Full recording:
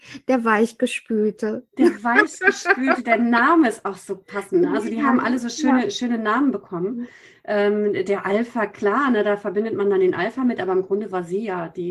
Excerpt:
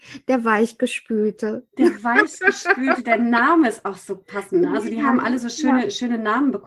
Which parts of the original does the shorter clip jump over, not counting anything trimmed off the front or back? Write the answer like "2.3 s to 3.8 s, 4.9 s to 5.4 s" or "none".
none